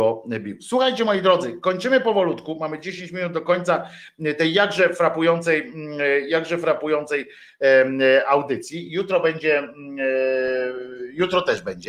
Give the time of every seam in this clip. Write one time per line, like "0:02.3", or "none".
none